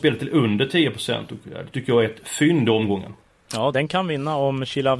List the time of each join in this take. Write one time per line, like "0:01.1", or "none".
0:03.7